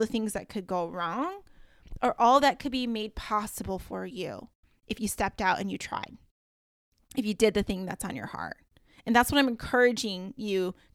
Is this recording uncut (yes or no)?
yes